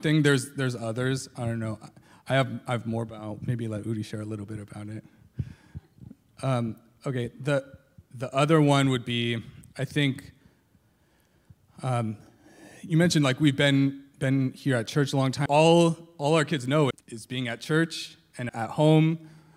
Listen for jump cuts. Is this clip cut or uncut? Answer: cut